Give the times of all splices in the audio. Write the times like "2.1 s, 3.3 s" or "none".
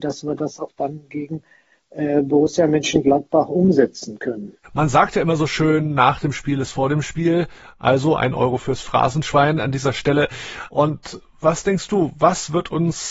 10.7 s